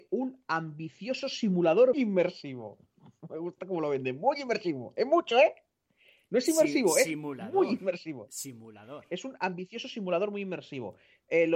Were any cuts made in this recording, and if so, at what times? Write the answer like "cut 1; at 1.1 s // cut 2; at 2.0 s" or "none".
cut 1; at 1.9 s